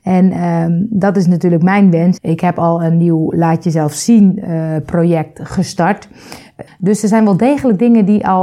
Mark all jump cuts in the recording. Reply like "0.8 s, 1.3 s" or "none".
2.2 s, 6.7 s